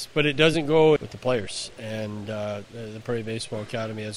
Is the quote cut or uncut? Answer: cut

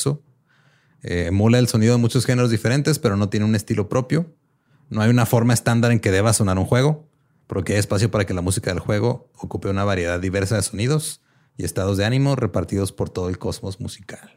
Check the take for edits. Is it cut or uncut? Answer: uncut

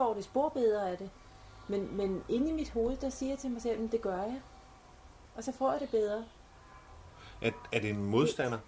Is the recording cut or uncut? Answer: uncut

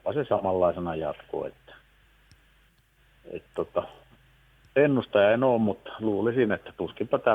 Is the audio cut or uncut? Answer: uncut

